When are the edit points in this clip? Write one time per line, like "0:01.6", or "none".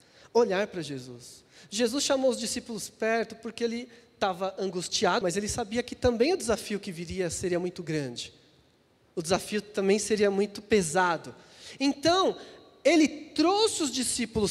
0:05.2

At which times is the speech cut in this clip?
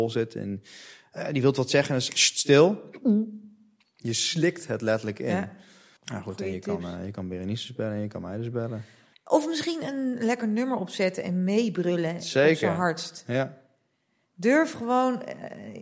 0:06.0
0:09.1

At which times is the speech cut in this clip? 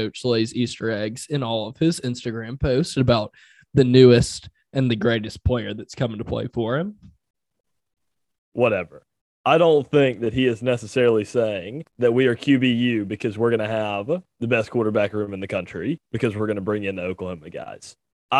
0:08.4
0:11.9

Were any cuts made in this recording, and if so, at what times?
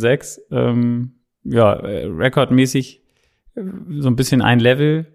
none

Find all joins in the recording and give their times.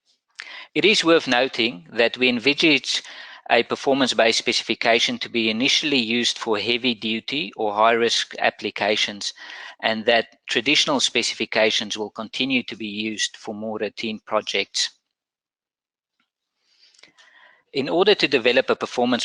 none

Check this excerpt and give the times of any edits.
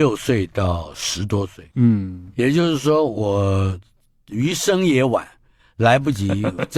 none

